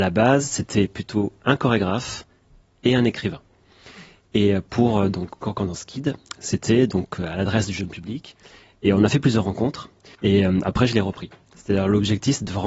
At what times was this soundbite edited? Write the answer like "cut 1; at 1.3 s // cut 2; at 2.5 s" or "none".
cut 1; at 10.1 s // cut 2; at 11.5 s